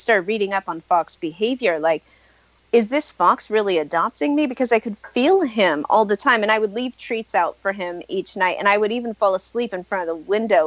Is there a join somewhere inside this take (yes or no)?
no